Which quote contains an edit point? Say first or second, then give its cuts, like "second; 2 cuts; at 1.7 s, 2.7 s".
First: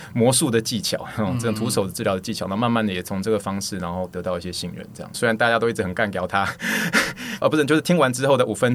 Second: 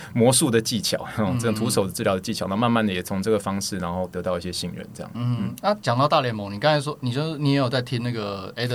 first; 2 cuts; at 5.1 s, 7.4 s